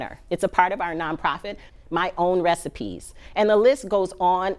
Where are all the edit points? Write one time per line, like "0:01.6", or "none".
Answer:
0:01.7